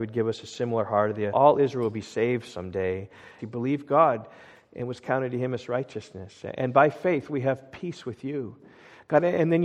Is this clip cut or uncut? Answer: cut